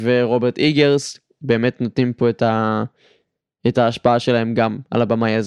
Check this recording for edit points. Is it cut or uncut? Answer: uncut